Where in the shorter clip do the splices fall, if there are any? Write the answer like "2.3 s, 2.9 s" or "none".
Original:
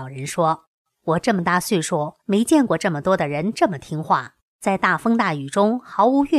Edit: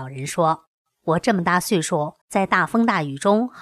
2.2 s